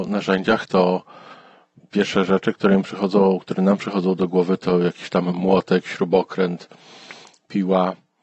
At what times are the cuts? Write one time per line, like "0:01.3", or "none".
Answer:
none